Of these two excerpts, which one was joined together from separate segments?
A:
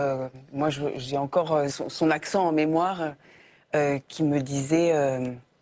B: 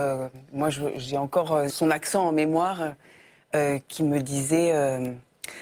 B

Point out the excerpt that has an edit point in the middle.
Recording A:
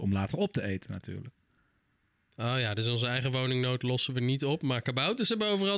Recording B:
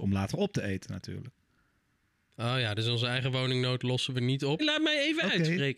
B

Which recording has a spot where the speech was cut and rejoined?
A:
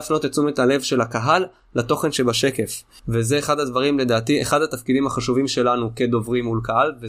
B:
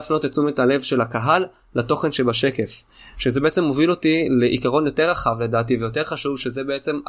A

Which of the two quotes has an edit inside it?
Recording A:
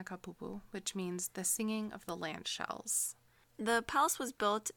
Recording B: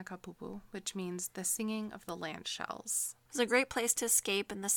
B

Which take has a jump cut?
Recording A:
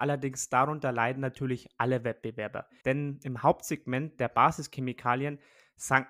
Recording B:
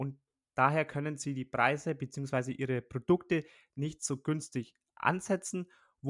A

